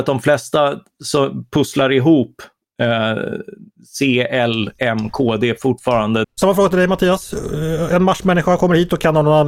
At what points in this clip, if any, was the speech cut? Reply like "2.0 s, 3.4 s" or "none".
6.2 s

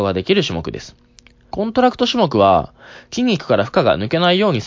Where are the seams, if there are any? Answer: 1.5 s

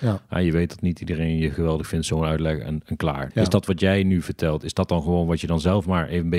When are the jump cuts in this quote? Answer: 3.3 s

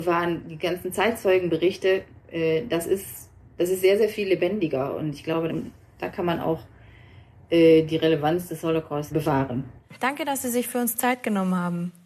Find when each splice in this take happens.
5.5 s

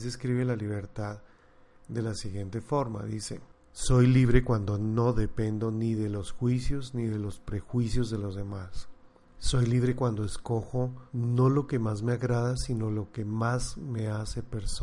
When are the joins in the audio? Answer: 9.2 s, 11.1 s

